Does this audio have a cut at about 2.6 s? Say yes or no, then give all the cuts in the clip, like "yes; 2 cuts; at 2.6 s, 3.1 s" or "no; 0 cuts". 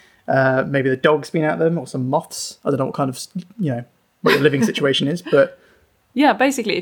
no; 0 cuts